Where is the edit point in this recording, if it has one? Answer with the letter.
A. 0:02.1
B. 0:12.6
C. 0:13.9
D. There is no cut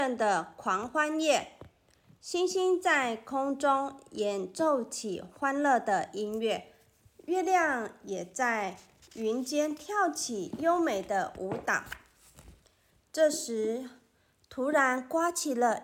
D